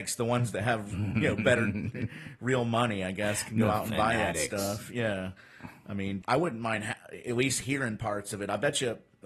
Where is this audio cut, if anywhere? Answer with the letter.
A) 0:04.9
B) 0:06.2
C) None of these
B